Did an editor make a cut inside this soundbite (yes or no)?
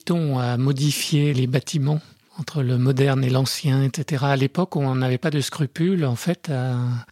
yes